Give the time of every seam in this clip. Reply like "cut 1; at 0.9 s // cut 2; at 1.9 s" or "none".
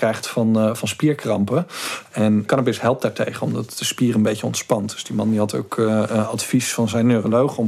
none